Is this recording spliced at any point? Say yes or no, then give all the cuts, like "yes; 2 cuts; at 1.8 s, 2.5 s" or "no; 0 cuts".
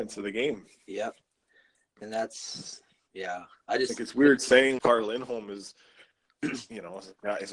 yes; 2 cuts; at 3.7 s, 4.8 s